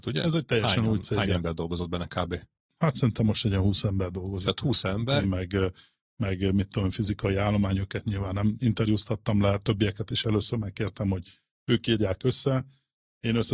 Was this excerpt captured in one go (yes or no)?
no